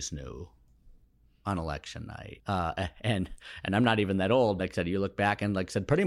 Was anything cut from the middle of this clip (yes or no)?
yes